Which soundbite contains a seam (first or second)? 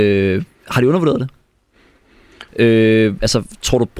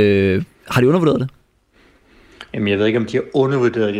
first